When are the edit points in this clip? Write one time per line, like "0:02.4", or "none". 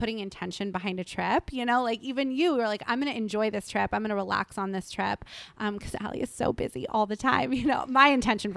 none